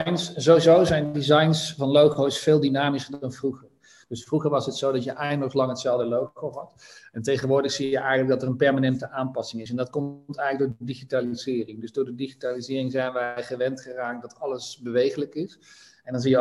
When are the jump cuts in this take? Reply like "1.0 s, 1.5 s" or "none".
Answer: none